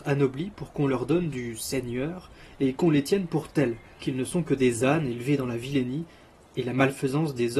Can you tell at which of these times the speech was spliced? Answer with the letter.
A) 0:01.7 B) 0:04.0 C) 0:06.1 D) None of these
B